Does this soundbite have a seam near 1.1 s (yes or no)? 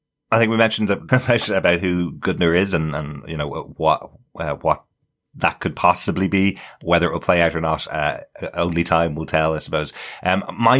yes